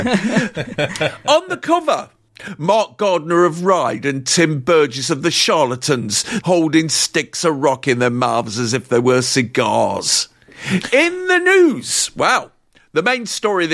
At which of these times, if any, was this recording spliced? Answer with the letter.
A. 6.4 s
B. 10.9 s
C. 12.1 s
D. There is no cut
A